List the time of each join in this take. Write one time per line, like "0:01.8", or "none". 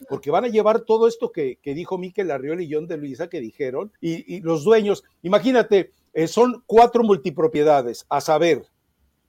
0:04.0